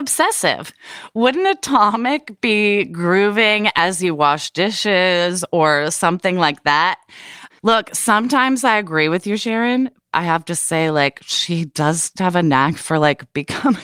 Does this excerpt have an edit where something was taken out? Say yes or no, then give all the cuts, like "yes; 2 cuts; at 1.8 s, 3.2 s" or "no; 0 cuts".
yes; 3 cuts; at 7.5 s, 10.1 s, 12.2 s